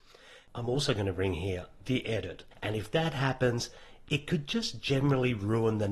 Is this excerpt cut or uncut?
cut